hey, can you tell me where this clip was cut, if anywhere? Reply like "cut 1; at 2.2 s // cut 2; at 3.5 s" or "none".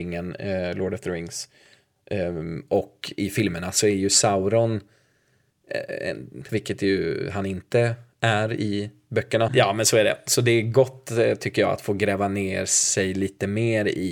cut 1; at 6.5 s // cut 2; at 9.5 s